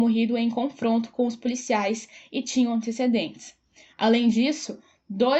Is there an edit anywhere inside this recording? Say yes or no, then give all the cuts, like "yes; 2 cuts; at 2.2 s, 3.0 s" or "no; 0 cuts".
yes; 1 cut; at 3.9 s